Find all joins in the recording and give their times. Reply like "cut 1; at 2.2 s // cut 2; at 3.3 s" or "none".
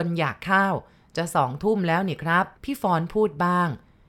cut 1; at 2.6 s